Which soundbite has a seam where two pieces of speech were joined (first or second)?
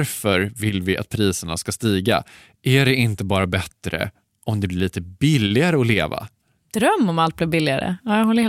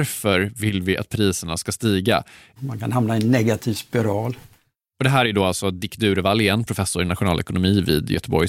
second